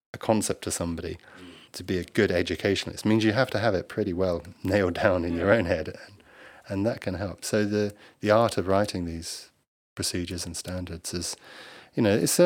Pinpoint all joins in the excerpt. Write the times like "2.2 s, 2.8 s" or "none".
1.7 s